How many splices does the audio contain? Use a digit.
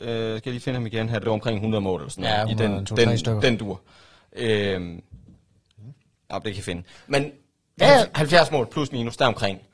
0